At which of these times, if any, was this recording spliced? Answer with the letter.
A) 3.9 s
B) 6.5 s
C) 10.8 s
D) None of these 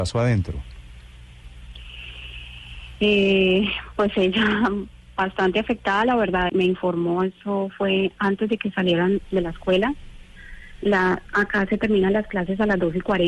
B